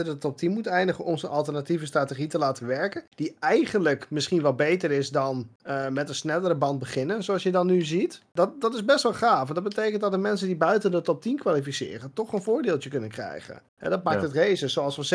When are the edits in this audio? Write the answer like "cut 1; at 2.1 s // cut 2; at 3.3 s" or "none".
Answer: cut 1; at 13.7 s